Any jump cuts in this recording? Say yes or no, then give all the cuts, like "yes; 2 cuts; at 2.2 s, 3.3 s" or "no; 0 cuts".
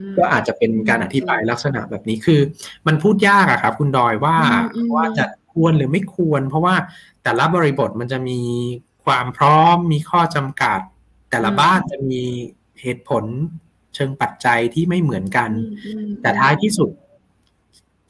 no; 0 cuts